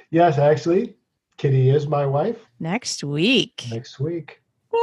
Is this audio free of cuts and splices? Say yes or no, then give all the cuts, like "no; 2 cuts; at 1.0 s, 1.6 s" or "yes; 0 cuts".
no; 1 cut; at 2.5 s